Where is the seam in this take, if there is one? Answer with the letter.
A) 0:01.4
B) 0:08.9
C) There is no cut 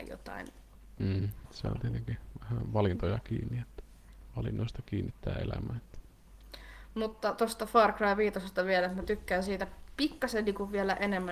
A